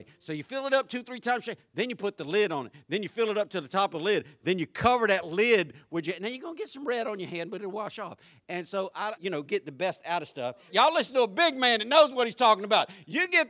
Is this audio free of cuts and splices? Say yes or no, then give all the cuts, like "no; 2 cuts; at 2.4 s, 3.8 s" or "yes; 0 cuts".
no; 2 cuts; at 9.2 s, 10.7 s